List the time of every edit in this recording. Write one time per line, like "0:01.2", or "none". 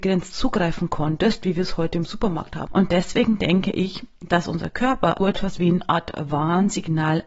0:02.7
0:05.2